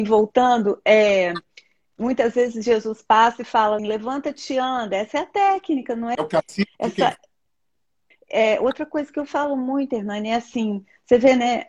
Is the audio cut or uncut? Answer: cut